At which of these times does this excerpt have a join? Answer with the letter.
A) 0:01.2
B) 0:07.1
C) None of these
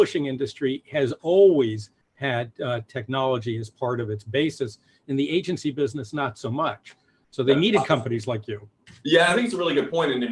C